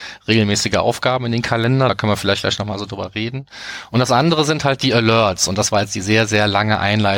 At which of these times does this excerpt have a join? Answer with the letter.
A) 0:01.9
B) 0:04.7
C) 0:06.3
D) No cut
D